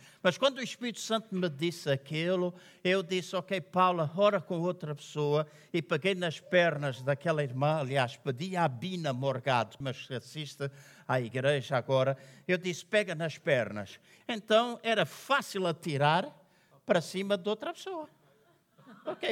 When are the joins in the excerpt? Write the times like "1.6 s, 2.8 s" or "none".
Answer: 9.8 s, 14.2 s

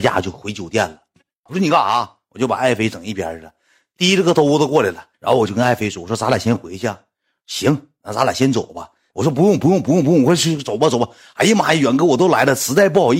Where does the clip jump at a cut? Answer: 1.5 s, 5.1 s, 9.1 s

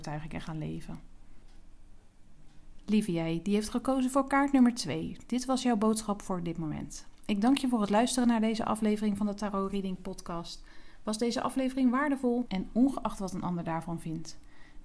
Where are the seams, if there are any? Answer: 12.5 s

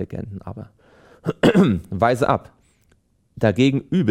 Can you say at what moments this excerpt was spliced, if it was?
none

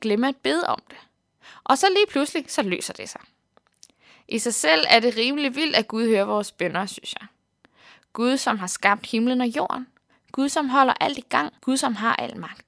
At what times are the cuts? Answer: 11.6 s

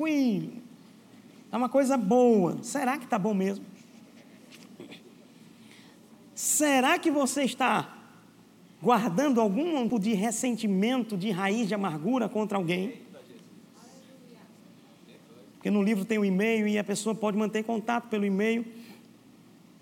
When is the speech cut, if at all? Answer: 9.9 s, 15.5 s

